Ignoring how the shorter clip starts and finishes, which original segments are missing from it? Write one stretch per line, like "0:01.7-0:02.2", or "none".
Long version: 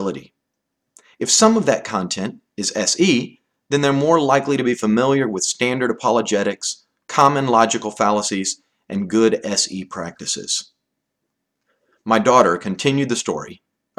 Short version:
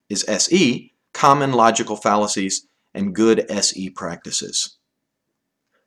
0:03.5-0:07.0